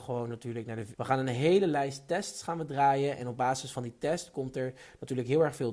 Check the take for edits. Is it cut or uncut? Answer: cut